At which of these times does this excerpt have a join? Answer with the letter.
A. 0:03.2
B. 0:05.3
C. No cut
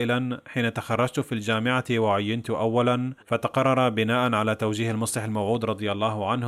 A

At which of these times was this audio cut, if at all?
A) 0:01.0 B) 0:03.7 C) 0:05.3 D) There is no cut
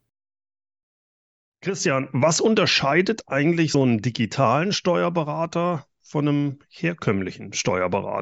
B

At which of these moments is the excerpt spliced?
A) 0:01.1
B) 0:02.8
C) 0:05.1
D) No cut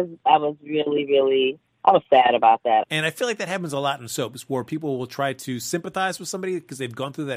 B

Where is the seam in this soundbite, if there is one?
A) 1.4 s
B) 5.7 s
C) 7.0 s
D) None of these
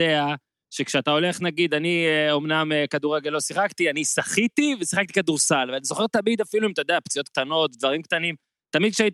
D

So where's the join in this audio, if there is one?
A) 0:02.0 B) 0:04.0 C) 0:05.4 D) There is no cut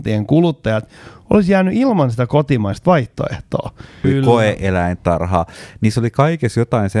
B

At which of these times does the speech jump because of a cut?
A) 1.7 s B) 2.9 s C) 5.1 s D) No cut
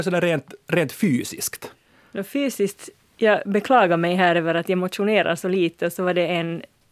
D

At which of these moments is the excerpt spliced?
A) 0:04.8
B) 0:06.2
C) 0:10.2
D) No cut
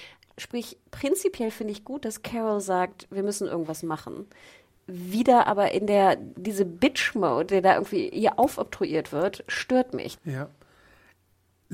C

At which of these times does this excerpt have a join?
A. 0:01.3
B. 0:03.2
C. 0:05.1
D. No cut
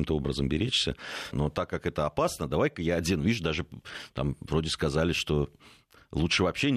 A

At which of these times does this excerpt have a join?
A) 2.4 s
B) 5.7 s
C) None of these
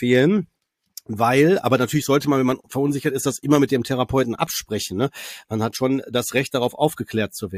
C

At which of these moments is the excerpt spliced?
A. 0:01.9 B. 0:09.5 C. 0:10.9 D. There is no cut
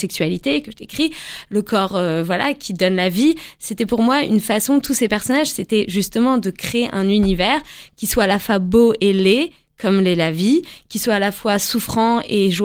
D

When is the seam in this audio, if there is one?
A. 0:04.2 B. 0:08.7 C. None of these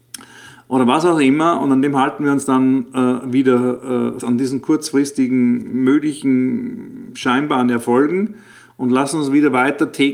A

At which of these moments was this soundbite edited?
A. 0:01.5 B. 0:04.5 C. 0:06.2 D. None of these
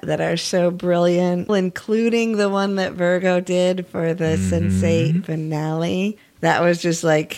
A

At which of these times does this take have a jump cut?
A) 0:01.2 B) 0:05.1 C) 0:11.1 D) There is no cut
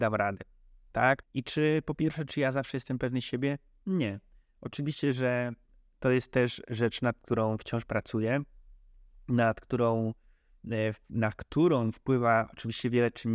A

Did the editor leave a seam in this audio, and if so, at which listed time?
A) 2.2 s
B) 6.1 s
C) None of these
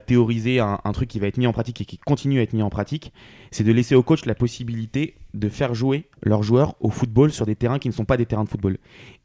B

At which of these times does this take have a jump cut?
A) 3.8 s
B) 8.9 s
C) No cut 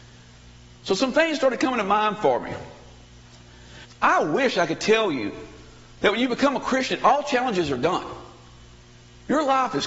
A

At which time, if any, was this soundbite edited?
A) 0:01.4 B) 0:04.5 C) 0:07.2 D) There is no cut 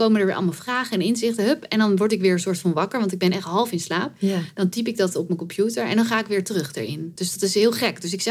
D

